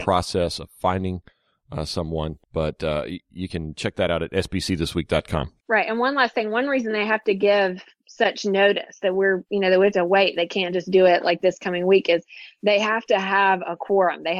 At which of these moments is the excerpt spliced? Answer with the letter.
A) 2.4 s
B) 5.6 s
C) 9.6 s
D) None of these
A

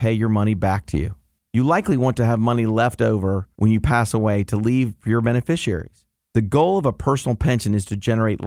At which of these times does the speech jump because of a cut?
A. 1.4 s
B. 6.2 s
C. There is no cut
A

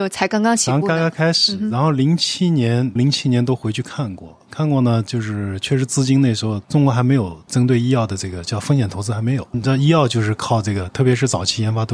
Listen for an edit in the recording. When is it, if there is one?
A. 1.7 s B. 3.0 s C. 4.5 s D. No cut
B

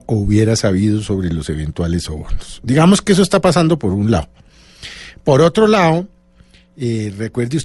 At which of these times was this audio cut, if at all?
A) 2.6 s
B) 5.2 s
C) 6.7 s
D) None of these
D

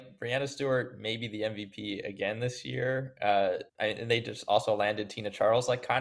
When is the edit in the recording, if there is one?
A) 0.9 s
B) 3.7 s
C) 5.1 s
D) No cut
B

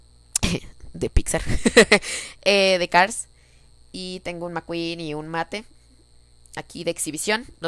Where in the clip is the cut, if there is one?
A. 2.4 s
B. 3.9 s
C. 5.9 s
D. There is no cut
D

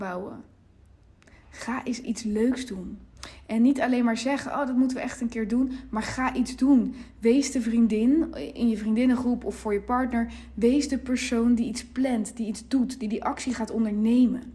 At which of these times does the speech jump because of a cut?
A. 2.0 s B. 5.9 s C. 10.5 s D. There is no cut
A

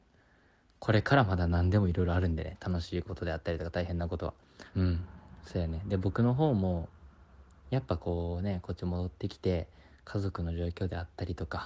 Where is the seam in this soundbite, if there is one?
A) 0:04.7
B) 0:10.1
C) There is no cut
A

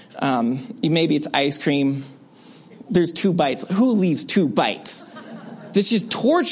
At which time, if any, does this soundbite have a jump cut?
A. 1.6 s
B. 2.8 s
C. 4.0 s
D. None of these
B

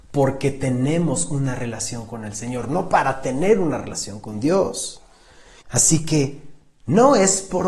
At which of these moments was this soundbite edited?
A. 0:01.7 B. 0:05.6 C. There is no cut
B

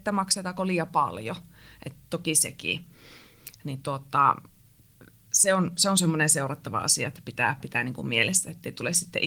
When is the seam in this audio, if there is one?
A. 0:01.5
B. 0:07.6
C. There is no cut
B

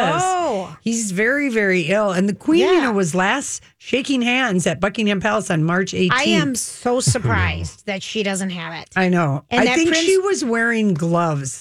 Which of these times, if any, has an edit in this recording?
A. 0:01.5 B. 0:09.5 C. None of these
C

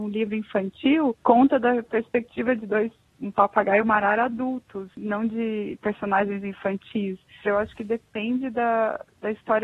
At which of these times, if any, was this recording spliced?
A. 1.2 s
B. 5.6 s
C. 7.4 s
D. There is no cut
C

